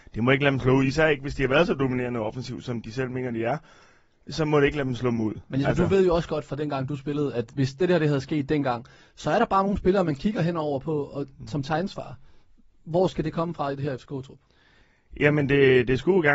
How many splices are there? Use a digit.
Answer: 0